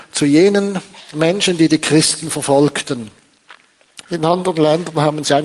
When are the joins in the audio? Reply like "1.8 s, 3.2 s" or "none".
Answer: 4.0 s